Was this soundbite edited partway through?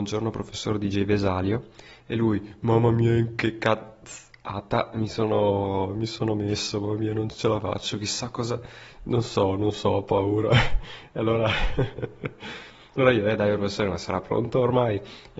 no; 0 cuts

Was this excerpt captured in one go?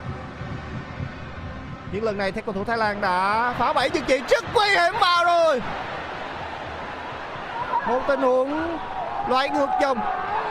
no; 1 cut; at 1.8 s

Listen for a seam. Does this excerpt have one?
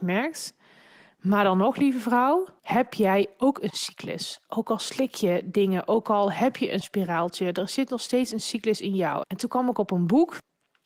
yes; 2 cuts; at 2.6 s, 9.2 s

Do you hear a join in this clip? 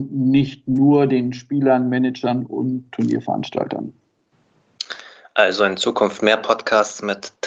no; 0 cuts

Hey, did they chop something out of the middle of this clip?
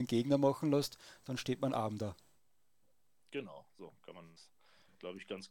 no; 0 cuts

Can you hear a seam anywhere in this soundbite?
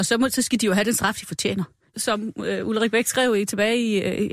yes; 1 cut; at 1.9 s

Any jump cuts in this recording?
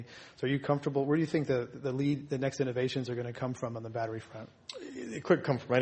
no; 0 cuts

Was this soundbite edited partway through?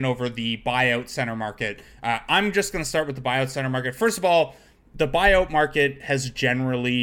no; 0 cuts

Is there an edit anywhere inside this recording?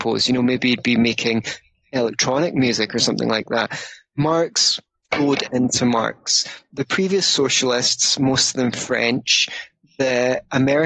yes; 1 cut; at 5.0 s

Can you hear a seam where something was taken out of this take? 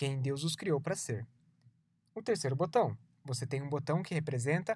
no; 0 cuts

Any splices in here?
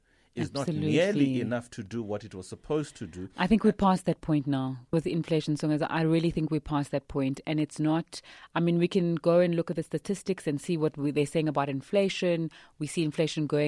yes; 1 cut; at 4.9 s

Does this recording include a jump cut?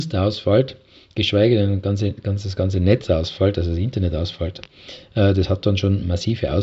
no; 0 cuts

